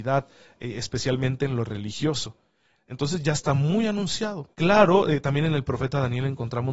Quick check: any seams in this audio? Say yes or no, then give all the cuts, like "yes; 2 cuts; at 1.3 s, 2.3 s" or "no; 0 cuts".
yes; 2 cuts; at 2.8 s, 4.5 s